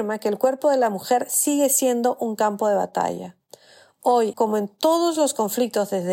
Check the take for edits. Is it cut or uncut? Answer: cut